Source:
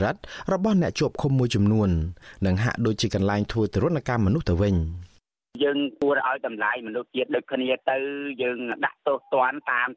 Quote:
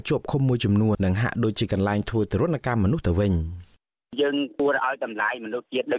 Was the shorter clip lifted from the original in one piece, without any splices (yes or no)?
no